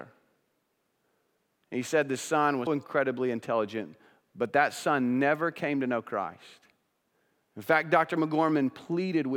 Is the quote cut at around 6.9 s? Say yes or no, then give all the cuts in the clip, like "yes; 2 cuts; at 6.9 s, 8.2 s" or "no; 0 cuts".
no; 1 cut; at 2.7 s